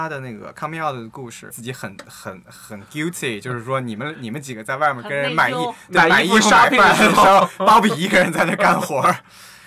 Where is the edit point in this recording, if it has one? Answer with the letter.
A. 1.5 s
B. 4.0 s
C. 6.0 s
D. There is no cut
A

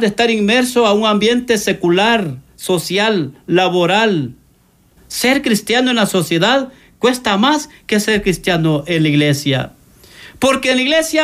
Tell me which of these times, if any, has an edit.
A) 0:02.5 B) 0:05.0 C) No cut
B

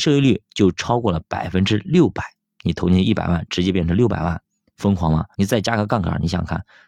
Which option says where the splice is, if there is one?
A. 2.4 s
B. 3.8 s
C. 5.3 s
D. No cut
C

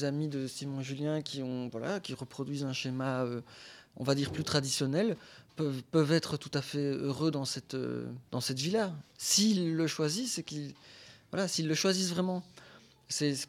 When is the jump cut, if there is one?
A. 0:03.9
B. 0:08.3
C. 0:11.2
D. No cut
B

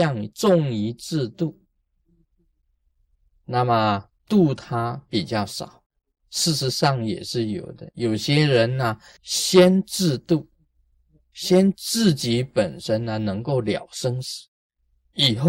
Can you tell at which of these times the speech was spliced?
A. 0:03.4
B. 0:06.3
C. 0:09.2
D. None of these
C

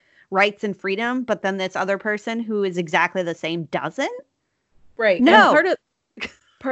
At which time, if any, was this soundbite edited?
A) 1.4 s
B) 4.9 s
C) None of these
C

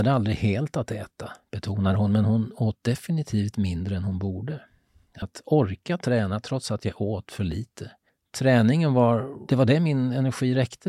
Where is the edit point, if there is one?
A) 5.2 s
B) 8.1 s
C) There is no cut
A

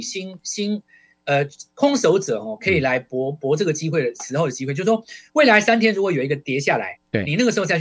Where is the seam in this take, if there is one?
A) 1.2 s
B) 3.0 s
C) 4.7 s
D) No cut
D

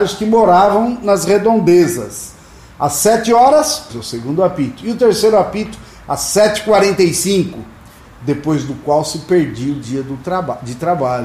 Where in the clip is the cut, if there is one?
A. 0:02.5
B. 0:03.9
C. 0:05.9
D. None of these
B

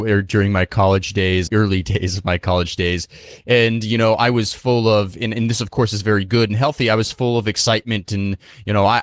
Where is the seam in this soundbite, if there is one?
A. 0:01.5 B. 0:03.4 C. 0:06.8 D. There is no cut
A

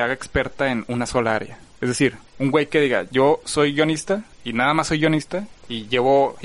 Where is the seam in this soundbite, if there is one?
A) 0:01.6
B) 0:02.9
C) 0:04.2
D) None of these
D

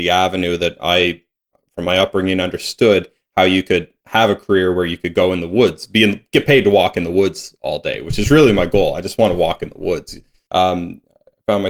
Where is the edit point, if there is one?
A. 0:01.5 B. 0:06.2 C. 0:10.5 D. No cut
C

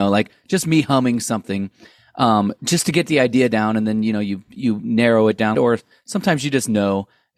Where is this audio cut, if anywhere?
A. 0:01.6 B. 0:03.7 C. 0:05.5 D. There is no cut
C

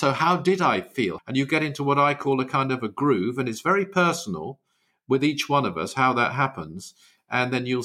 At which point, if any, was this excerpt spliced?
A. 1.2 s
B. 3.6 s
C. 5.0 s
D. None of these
A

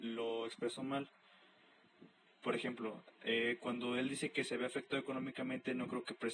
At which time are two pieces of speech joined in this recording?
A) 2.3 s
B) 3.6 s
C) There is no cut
A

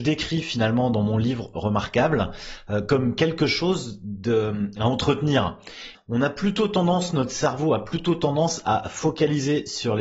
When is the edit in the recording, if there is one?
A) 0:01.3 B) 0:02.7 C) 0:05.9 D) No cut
C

